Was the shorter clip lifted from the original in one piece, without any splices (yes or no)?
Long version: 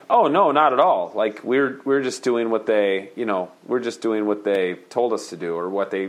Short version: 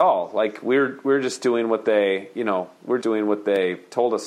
no